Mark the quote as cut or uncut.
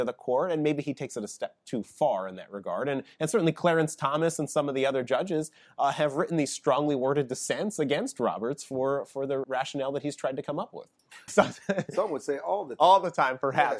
cut